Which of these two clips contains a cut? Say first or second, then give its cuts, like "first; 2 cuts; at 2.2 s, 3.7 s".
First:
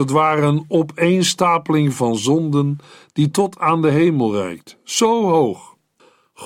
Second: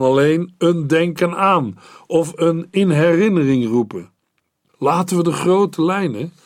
second; 1 cut; at 4.7 s